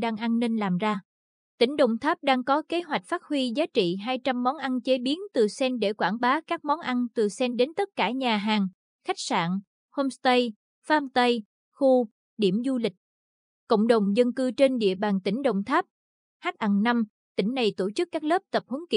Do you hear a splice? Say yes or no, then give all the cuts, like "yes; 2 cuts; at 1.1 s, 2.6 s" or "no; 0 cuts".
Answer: no; 0 cuts